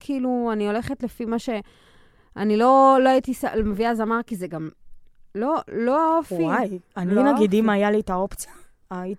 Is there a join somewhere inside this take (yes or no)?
no